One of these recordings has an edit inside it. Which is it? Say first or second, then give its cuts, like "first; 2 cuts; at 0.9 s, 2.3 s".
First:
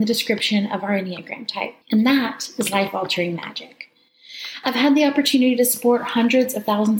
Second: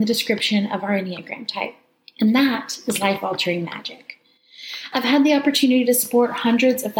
first; 1 cut; at 1.8 s